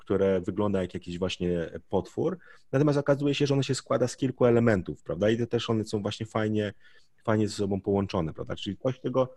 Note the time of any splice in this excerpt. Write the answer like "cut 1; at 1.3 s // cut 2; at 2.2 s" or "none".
none

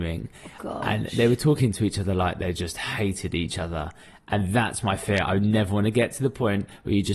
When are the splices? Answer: none

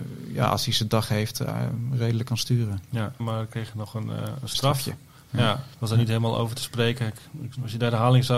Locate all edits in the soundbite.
cut 1; at 3.2 s

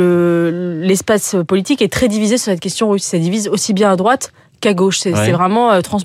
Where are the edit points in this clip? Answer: none

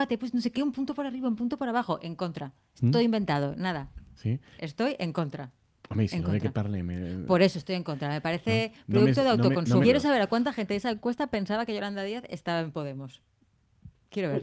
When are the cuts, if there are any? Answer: cut 1; at 4.6 s // cut 2; at 9.8 s

